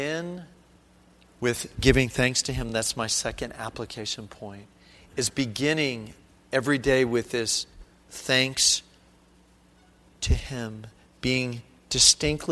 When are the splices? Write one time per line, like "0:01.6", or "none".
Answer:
none